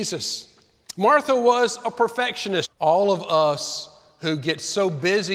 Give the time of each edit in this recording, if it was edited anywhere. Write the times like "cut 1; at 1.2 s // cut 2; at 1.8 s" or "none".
cut 1; at 2.6 s